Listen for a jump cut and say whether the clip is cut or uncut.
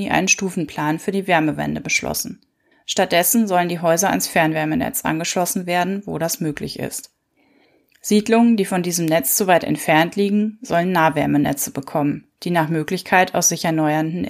cut